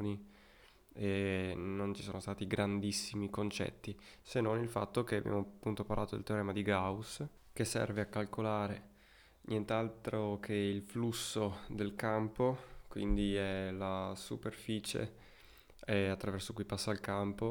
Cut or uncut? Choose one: uncut